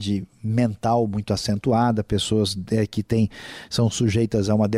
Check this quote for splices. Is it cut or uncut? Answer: uncut